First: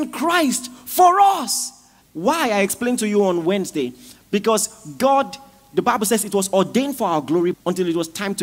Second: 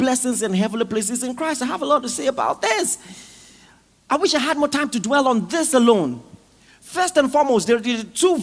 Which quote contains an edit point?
first; 2 cuts; at 2.0 s, 7.5 s

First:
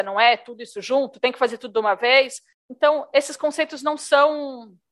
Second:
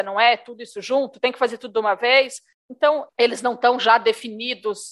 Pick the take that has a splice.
second; 1 cut; at 3.1 s

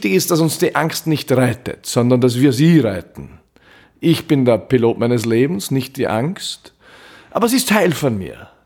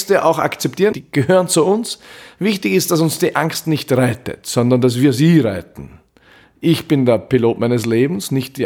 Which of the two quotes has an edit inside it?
second; 1 cut; at 0.9 s

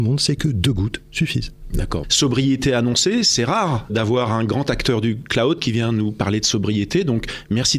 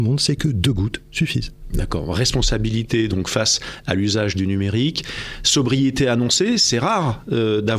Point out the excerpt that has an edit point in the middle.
first; 2 cuts; at 2.0 s, 3.9 s

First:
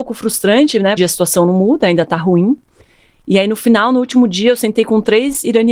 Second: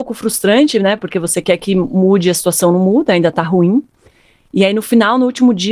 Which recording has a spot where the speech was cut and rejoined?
first; 1 cut; at 1.0 s

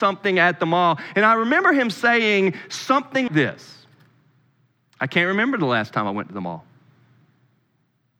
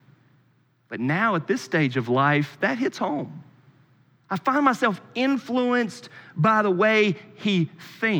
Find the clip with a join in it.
first; 1 cut; at 3.3 s

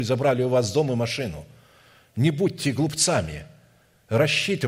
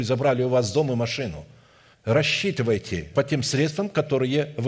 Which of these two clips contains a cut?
second; 2 cuts; at 1.9 s, 3.1 s

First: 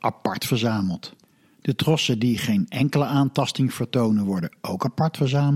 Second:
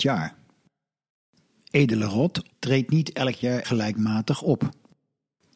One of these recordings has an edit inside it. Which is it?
second; 2 cuts; at 2.5 s, 3.6 s

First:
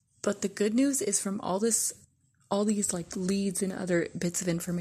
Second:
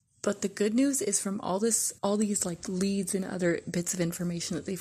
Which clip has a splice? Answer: second; 1 cut; at 2.0 s

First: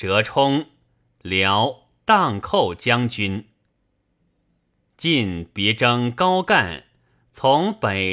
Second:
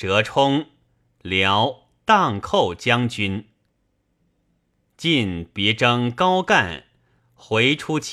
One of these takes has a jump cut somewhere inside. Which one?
second; 1 cut; at 7.2 s

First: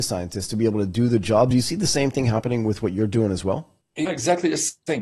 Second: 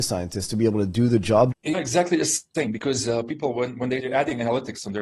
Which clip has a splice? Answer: second; 1 cut; at 1.5 s

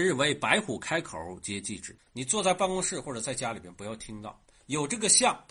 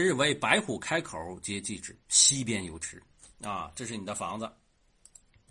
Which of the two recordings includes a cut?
first; 1 cut; at 2.0 s

